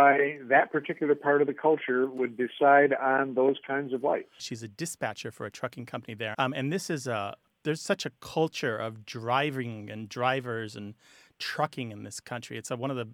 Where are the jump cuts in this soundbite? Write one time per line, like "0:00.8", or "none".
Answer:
0:04.4
0:06.3
0:07.5